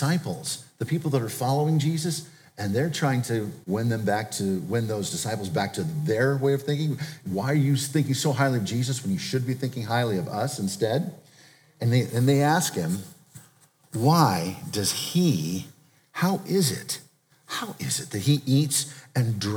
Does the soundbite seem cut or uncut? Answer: cut